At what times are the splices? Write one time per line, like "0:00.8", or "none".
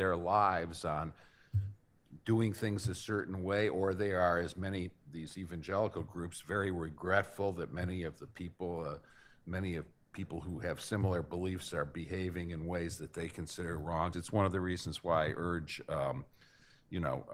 0:14.1